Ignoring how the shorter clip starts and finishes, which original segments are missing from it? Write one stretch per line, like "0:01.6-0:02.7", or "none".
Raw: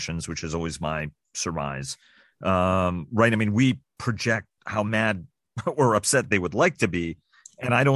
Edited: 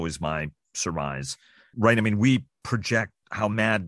0:02.3-0:03.1

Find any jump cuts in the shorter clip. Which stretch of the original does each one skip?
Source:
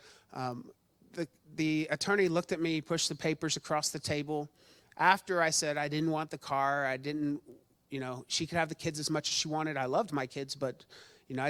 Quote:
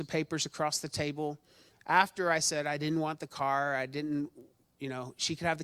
none

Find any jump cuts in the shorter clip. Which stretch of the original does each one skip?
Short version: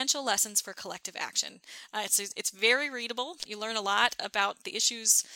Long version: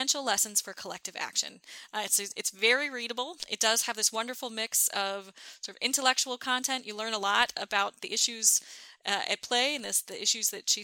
0:03.5-0:06.8

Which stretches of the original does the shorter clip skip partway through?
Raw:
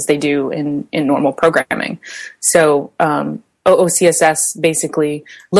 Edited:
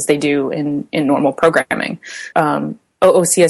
0:02.3-0:02.9

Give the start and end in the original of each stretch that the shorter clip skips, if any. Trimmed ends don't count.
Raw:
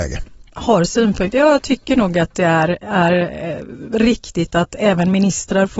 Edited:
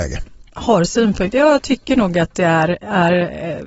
none

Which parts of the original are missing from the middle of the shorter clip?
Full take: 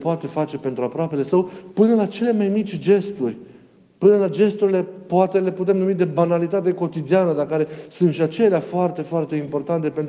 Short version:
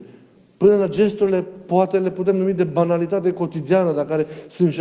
none

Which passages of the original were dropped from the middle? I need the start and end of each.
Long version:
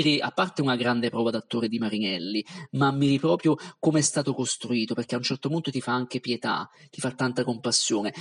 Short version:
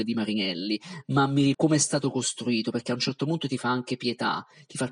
0:03.2-0:03.8

